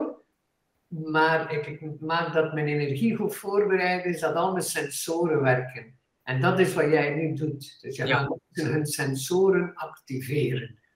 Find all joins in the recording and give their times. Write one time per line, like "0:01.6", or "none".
none